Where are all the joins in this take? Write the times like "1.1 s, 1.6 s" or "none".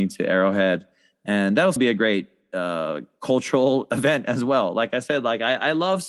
1.8 s